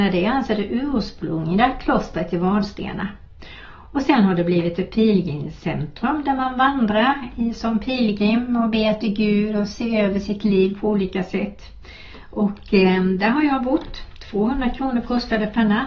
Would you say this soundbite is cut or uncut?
uncut